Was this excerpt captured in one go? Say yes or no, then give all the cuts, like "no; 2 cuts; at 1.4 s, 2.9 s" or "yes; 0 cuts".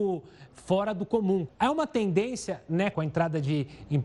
no; 2 cuts; at 1.5 s, 2.9 s